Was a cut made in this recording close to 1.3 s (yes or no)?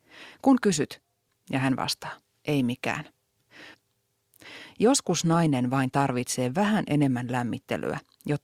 yes